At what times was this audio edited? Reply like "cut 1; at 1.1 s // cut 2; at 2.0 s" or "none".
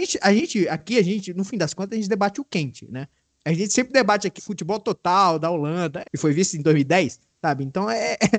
cut 1; at 4.4 s // cut 2; at 6.0 s